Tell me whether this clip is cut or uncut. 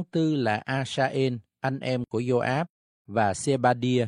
uncut